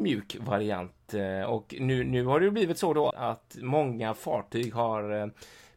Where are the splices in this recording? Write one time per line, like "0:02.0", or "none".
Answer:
0:03.1